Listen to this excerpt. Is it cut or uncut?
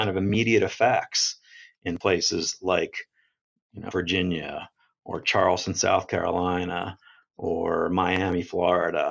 cut